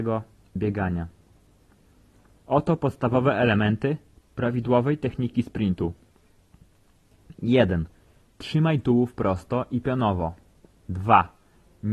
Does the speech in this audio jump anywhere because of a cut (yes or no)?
no